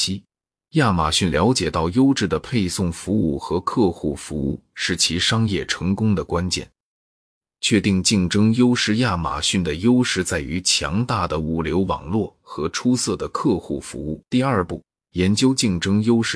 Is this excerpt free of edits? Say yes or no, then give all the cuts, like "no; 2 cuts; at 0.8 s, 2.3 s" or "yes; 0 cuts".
no; 2 cuts; at 7.5 s, 14.2 s